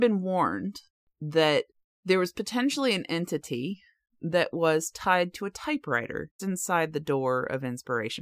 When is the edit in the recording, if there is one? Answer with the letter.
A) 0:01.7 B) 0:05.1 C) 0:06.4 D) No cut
C